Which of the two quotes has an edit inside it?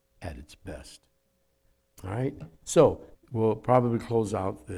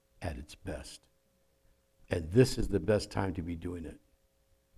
first; 2 cuts; at 2.0 s, 3.1 s

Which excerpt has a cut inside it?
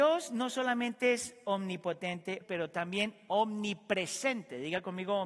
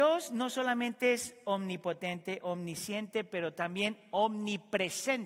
first; 1 cut; at 2.4 s

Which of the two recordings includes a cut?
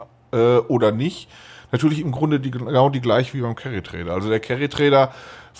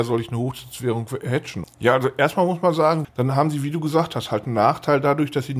second; 2 cuts; at 1.6 s, 3.0 s

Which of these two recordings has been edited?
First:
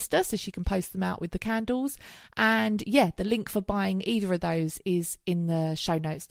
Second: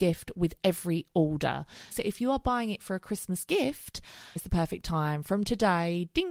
second; 2 cuts; at 1.9 s, 4.4 s

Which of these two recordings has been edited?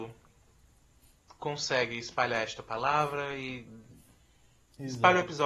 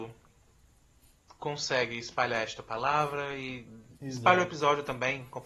second; 1 cut; at 4.0 s

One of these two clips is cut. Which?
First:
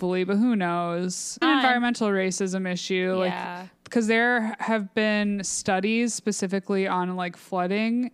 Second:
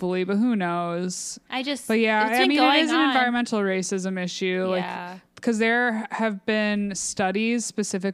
first; 1 cut; at 1.4 s

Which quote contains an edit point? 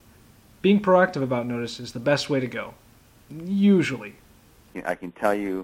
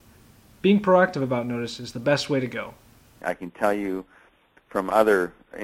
second; 1 cut; at 3.2 s

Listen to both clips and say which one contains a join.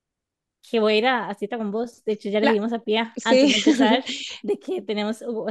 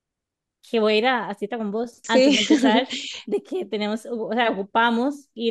second; 1 cut; at 2.0 s

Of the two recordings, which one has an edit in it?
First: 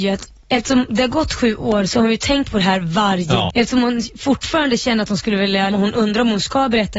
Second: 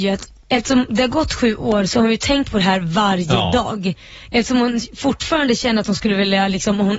first; 2 cuts; at 3.5 s, 5.7 s

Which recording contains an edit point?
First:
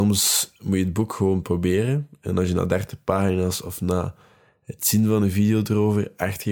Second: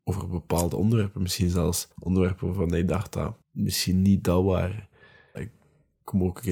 second; 3 cuts; at 1.9 s, 3.4 s, 5.3 s

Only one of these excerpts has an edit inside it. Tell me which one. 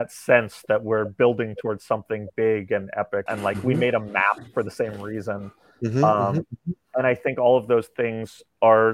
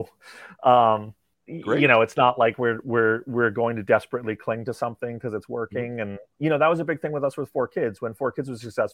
first; 1 cut; at 3.3 s

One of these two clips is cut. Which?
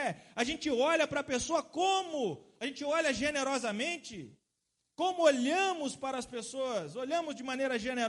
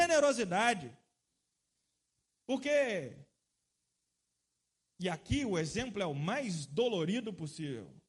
first; 1 cut; at 4.8 s

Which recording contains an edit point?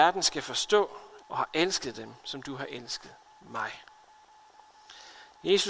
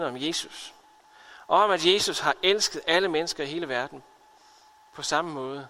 first; 1 cut; at 1.2 s

